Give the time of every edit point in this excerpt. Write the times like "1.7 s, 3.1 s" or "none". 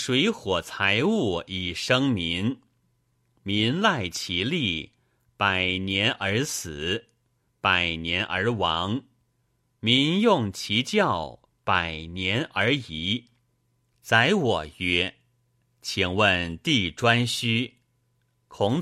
7.5 s, 13.9 s